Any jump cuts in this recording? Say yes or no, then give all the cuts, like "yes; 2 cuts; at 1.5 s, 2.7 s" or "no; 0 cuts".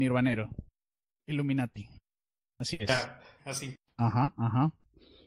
yes; 2 cuts; at 1.1 s, 3.4 s